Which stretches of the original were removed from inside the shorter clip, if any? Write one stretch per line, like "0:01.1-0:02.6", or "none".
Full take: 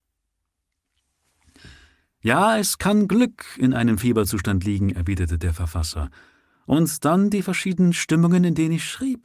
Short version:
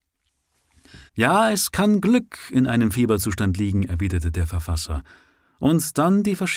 0:01.8-0:02.1